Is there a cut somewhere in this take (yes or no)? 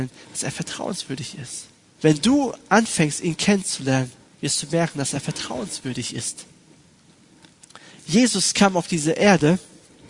yes